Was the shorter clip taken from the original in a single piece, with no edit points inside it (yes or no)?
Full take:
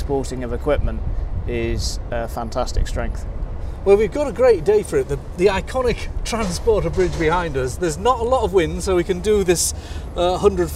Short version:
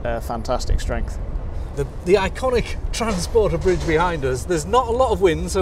no